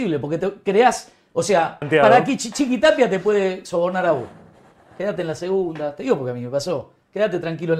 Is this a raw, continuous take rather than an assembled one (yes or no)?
no